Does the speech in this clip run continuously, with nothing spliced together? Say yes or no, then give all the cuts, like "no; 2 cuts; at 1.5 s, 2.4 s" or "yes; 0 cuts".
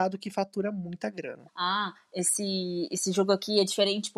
no; 1 cut; at 1.5 s